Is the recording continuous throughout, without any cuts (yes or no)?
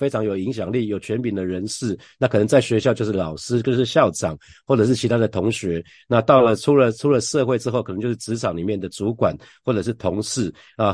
yes